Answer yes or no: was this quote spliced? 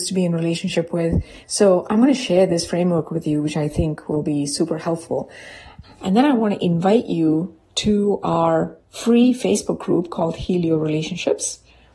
yes